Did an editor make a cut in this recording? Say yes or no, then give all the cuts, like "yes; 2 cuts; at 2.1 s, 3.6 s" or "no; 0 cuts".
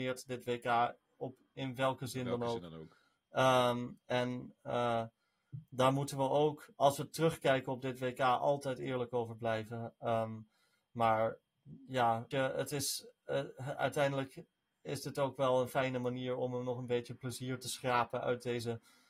yes; 1 cut; at 12.3 s